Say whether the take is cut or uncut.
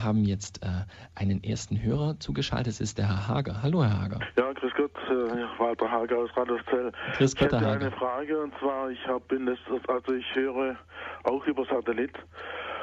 uncut